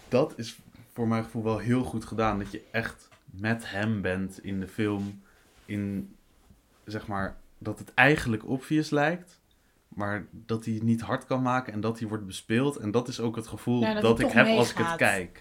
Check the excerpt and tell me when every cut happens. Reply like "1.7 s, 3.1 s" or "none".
none